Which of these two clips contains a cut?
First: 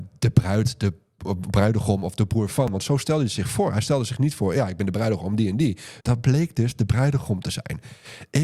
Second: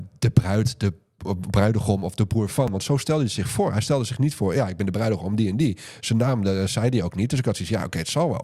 first; 1 cut; at 6.0 s

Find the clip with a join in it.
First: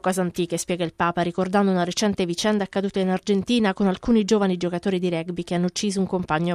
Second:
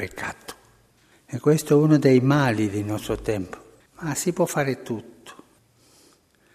second; 1 cut; at 3.9 s

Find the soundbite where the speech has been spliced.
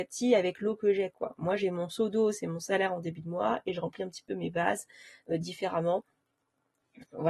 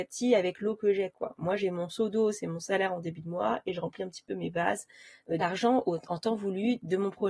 second; 1 cut; at 5.4 s

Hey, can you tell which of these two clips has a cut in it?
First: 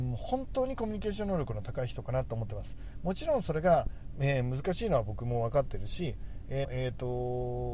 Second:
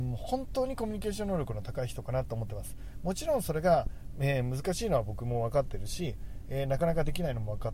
first; 1 cut; at 6.6 s

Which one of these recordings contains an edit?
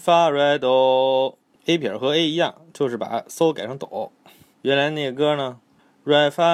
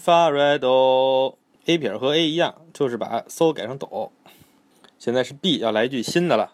first; 1 cut; at 4.5 s

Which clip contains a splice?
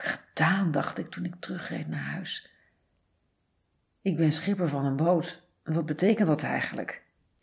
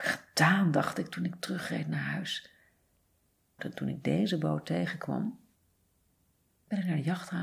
second; 1 cut; at 3.6 s

